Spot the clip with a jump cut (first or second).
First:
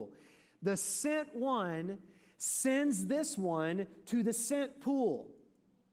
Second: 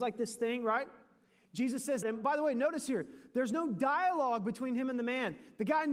second